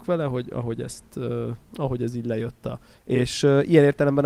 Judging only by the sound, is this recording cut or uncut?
cut